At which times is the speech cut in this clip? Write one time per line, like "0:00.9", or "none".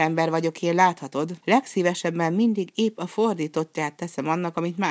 0:01.4